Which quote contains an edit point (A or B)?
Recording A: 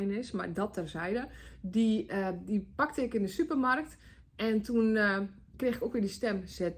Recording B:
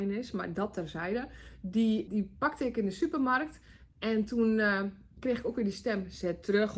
B